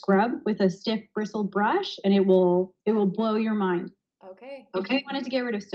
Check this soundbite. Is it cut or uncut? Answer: cut